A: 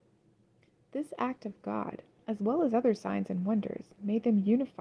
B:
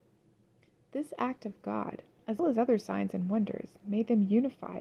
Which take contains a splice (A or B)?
B